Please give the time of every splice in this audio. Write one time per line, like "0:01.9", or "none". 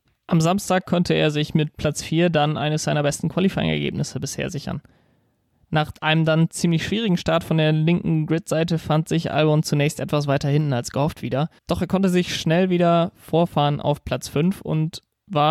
0:11.6